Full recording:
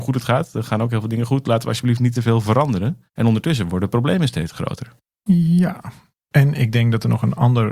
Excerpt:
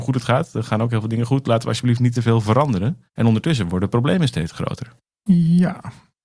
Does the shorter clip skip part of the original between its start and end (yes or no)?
no